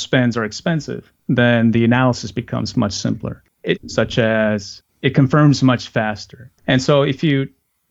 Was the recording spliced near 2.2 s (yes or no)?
no